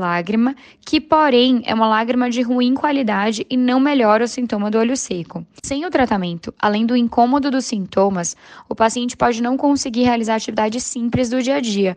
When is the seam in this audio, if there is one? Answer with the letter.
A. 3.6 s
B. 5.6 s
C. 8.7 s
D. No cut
B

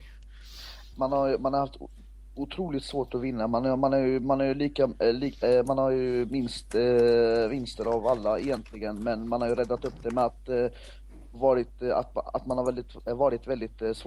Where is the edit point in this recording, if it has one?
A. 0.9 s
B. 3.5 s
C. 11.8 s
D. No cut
A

